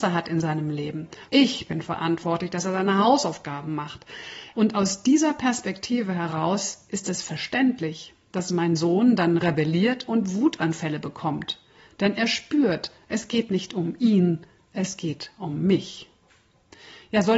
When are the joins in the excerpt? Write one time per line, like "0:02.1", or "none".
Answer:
0:01.3
0:04.5